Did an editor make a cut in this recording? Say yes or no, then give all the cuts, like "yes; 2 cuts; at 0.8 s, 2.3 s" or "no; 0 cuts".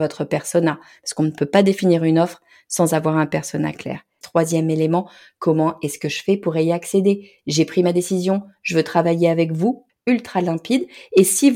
yes; 2 cuts; at 4.2 s, 9.9 s